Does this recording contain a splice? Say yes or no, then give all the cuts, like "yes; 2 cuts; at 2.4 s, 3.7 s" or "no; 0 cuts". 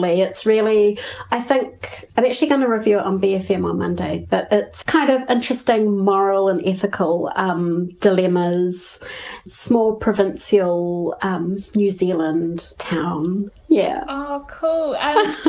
yes; 2 cuts; at 4.8 s, 9.5 s